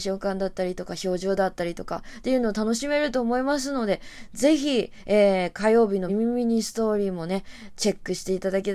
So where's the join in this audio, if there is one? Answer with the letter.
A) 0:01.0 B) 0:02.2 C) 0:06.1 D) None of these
C